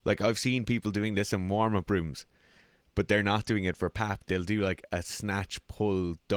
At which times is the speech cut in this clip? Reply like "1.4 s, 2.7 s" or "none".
4.3 s